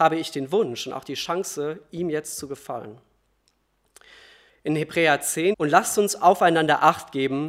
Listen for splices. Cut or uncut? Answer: cut